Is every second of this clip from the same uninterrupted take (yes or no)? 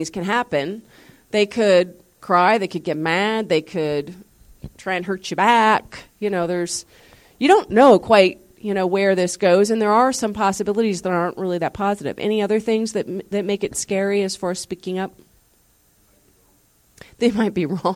yes